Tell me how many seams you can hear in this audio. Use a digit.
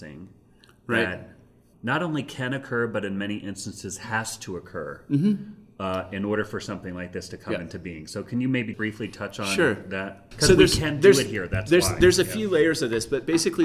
3